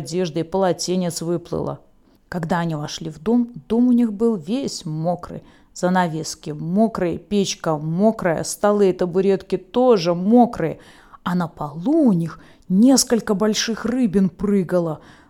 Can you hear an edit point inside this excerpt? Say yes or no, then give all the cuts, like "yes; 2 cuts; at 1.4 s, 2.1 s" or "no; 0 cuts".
no; 0 cuts